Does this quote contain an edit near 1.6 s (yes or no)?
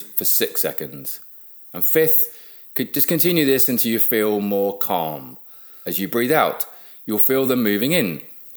no